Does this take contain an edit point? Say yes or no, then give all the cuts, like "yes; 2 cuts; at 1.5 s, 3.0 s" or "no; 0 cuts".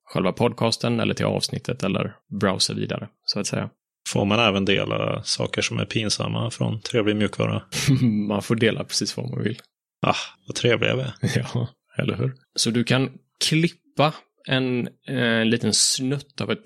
yes; 1 cut; at 12.4 s